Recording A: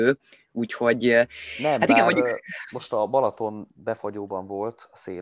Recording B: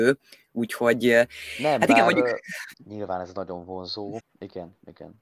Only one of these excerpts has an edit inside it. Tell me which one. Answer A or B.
B